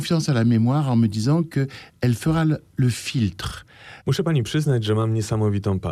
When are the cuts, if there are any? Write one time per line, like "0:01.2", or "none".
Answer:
0:04.0